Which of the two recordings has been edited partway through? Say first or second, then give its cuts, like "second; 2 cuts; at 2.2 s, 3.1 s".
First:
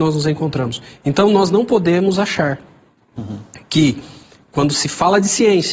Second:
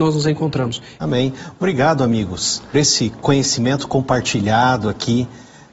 second; 2 cuts; at 1.0 s, 2.7 s